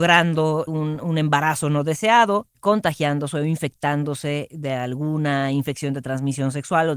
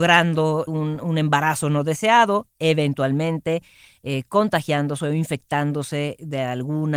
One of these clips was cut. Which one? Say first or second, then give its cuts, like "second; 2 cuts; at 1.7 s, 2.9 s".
first; 1 cut; at 2.5 s